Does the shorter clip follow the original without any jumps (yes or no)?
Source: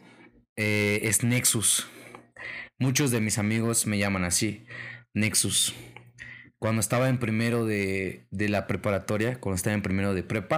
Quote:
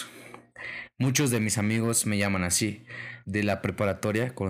no